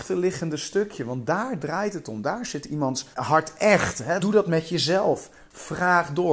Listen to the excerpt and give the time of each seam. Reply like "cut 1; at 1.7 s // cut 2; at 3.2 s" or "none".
cut 1; at 3.1 s // cut 2; at 4.2 s